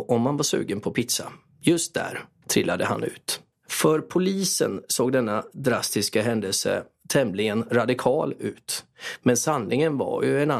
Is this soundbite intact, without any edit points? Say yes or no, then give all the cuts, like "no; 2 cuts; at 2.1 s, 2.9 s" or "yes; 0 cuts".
no; 1 cut; at 2.4 s